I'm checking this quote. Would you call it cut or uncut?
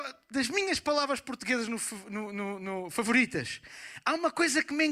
uncut